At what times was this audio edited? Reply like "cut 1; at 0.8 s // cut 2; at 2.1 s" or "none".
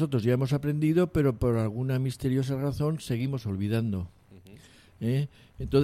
none